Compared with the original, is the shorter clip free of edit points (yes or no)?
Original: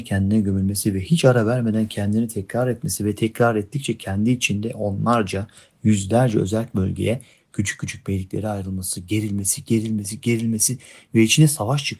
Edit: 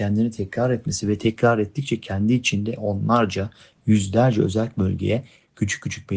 yes